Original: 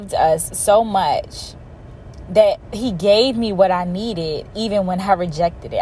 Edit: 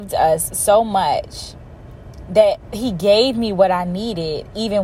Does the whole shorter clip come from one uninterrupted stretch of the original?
yes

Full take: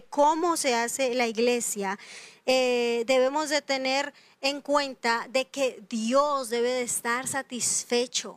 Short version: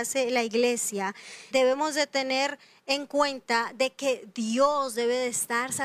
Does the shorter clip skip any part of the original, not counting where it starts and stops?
yes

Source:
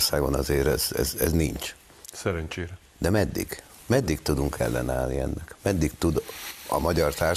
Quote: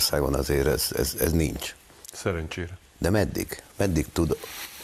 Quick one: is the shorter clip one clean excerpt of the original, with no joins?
no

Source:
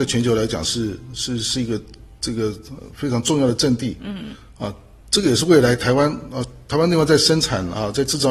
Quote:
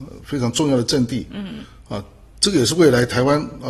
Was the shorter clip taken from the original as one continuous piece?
yes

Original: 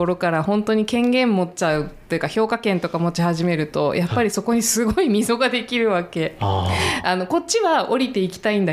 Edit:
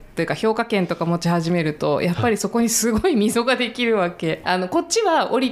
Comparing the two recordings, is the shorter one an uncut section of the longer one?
no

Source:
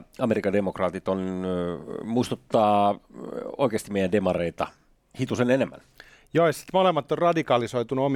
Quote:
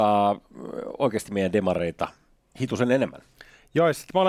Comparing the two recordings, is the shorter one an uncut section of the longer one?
yes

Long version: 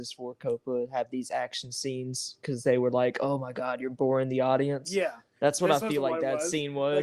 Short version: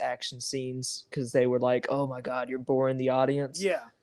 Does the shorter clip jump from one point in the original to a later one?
no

